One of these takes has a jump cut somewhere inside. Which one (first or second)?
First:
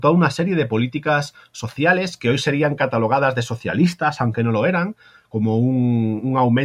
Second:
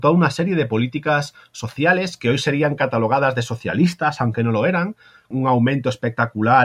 second